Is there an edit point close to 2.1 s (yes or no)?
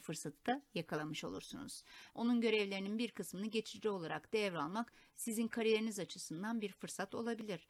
yes